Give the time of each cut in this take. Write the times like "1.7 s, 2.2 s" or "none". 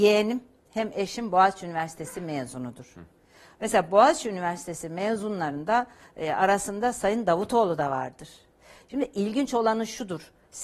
none